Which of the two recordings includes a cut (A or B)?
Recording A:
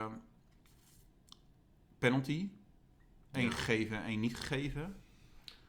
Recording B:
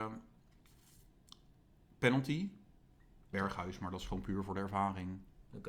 B